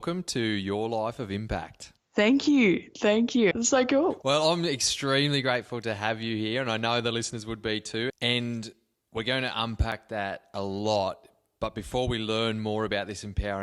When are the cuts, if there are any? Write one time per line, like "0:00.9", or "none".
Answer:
0:03.5
0:08.1